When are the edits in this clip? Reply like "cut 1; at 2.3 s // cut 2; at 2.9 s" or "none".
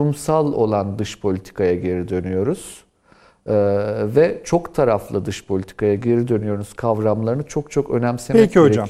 none